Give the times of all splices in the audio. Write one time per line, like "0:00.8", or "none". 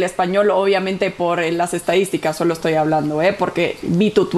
none